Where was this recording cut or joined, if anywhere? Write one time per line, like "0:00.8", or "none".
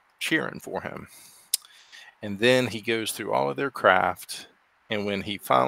none